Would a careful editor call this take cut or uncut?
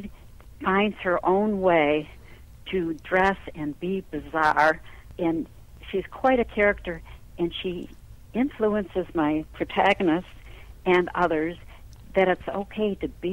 uncut